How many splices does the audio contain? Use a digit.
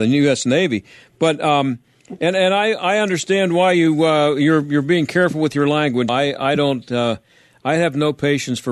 1